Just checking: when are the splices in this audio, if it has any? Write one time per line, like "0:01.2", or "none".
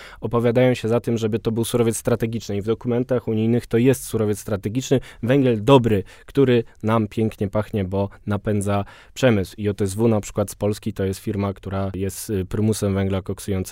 0:09.6